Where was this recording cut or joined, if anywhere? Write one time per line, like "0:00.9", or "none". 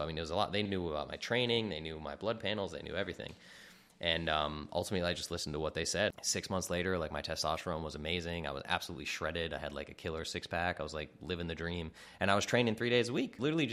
none